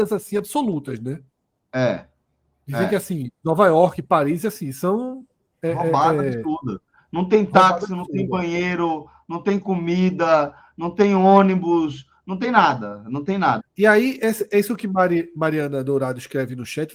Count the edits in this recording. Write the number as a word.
one